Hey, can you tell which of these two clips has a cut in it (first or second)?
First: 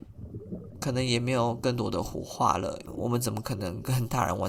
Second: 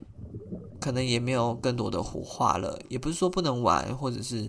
first